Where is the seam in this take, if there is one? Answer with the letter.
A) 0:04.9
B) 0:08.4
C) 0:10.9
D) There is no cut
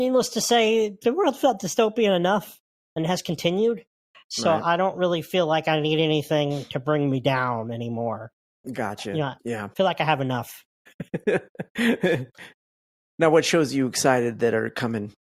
C